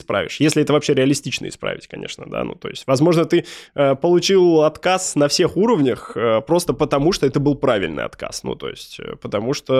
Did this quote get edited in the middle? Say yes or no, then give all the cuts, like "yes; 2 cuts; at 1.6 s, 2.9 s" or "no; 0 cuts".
no; 0 cuts